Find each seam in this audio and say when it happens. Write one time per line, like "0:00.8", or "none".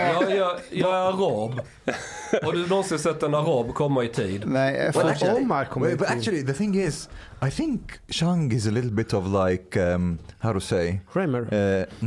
none